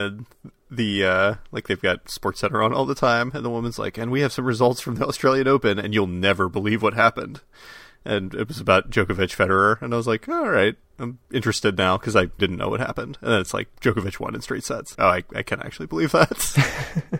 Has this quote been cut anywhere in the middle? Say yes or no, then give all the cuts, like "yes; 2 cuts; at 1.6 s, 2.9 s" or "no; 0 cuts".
yes; 2 cuts; at 12.4 s, 14.9 s